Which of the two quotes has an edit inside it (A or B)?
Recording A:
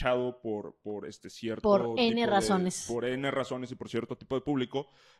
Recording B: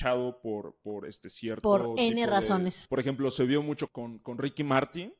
B